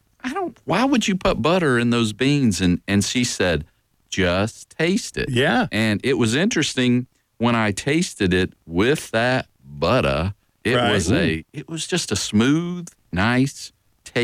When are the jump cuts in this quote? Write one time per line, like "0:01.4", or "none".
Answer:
none